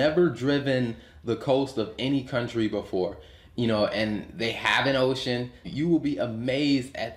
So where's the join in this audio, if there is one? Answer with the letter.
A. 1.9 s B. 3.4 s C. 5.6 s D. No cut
C